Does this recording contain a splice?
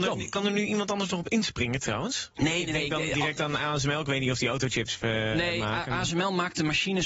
no; 0 cuts

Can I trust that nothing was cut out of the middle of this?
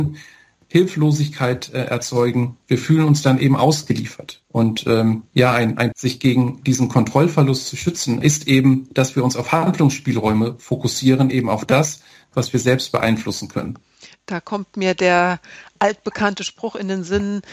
no; 1 cut; at 5.9 s

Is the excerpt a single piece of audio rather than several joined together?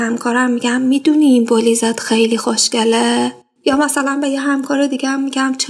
no; 1 cut; at 3.6 s

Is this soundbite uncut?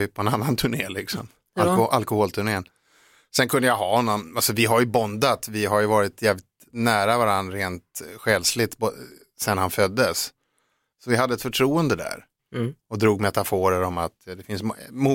no; 2 cuts; at 10.9 s, 12.4 s

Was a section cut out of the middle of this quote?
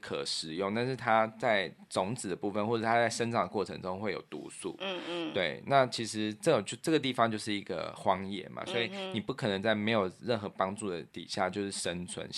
yes; 1 cut; at 11.1 s

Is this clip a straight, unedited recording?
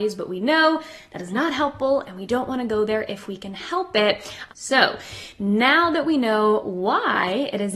no; 1 cut; at 4.5 s

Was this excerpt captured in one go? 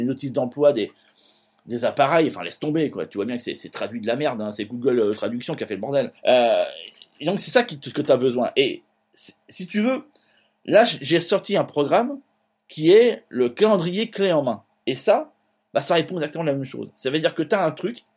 no; 1 cut; at 6.2 s

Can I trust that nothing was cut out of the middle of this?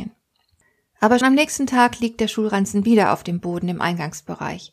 no; 1 cut; at 1.2 s

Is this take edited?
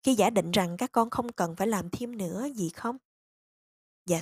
no; 0 cuts

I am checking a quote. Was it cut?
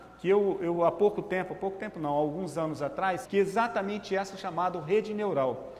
yes; 1 cut; at 3.3 s

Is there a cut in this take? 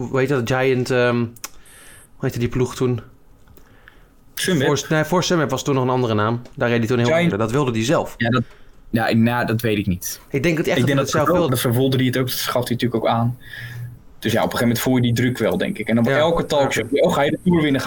yes; 2 cuts; at 7.3 s, 11.5 s

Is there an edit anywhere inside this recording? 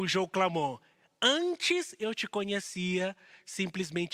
no; 0 cuts

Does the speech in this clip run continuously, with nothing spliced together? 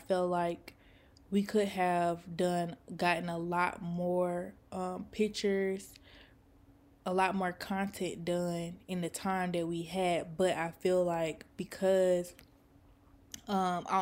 yes; 0 cuts

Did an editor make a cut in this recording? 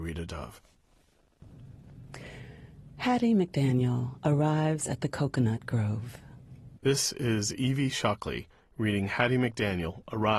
yes; 1 cut; at 6.8 s

